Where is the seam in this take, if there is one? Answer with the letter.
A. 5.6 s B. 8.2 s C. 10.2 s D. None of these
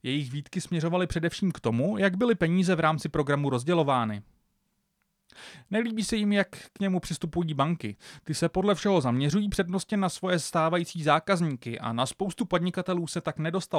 D